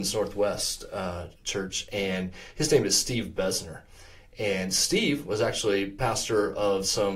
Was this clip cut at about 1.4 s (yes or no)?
yes